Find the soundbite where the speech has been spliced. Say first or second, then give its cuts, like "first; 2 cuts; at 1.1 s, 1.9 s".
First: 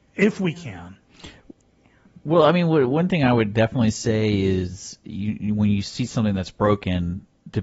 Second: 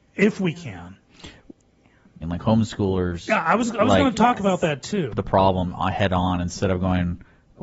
second; 2 cuts; at 2.2 s, 5.1 s